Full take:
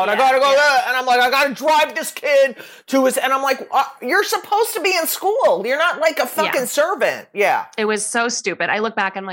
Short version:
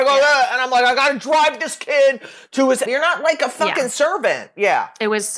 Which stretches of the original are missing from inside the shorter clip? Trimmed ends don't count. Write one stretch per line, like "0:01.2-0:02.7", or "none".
0:03.2-0:05.6